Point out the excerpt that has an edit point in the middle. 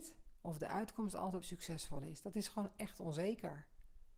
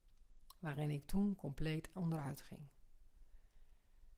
first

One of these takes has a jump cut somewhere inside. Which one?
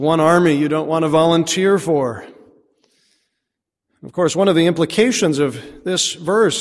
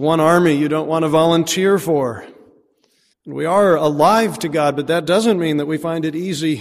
second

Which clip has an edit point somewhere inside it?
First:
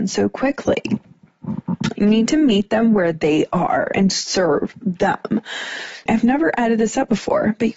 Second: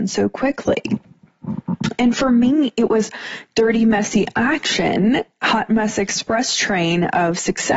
first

